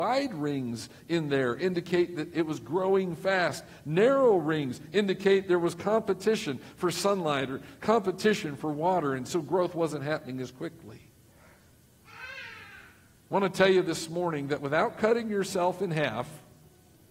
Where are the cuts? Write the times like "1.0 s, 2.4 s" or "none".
none